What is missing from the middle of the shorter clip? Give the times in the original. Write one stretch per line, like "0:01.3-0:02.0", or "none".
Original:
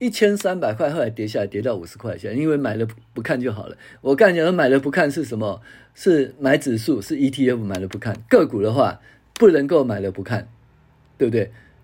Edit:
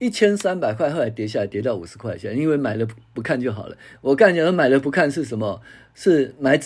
none